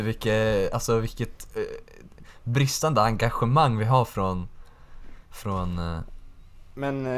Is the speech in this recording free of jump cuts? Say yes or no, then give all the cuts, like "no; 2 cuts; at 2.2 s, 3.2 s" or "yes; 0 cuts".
yes; 0 cuts